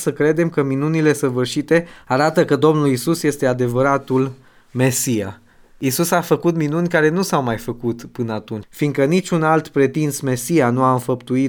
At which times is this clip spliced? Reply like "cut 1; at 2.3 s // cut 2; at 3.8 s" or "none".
cut 1; at 8.6 s